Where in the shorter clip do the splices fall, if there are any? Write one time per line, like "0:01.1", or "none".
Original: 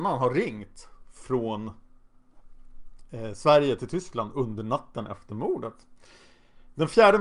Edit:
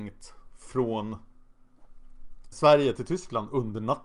0:02.5